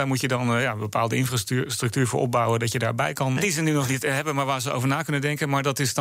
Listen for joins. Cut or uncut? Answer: cut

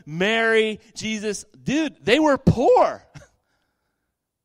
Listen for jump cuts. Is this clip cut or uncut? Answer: uncut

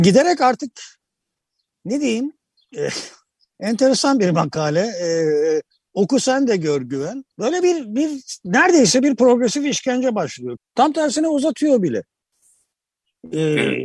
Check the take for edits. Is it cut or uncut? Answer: cut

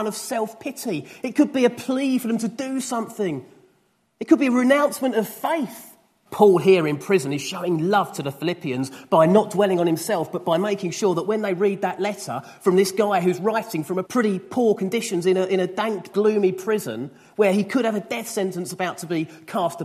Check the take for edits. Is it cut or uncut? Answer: cut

